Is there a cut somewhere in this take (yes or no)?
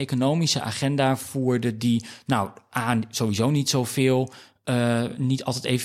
no